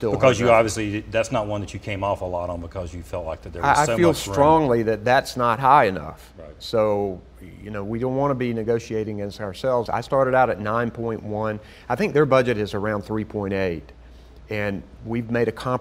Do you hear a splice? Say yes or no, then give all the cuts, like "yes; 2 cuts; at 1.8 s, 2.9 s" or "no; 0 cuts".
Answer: yes; 1 cut; at 9.9 s